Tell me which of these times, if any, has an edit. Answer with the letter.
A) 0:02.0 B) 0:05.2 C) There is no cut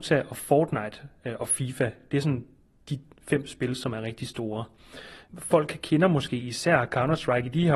C